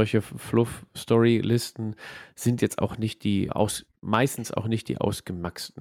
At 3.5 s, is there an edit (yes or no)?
yes